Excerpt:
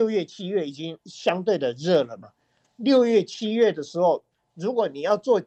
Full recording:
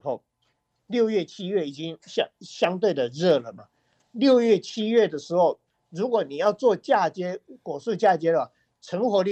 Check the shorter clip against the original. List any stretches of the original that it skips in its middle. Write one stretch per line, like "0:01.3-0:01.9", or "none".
0:02.0-0:02.3